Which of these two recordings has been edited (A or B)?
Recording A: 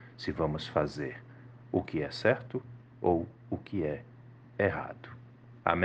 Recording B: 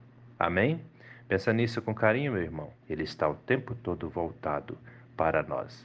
B